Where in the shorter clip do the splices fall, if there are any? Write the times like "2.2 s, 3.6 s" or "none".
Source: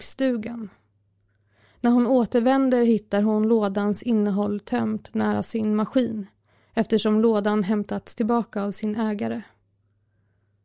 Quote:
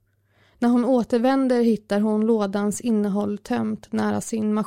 none